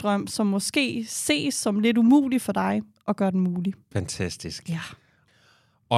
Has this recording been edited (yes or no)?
yes